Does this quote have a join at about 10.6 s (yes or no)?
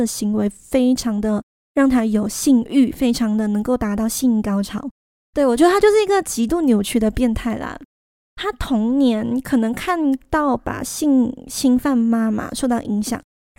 yes